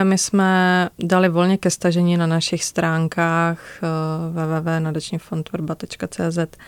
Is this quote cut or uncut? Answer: cut